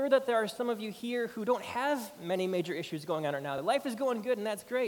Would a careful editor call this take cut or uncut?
uncut